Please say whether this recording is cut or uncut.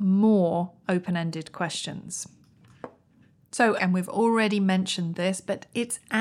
cut